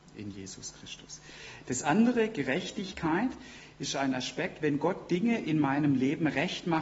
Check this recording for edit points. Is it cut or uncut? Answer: uncut